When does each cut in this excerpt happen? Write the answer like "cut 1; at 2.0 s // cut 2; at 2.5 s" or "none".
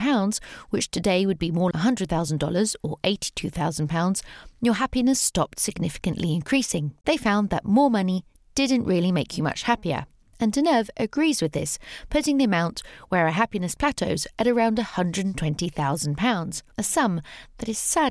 cut 1; at 1.7 s // cut 2; at 16.7 s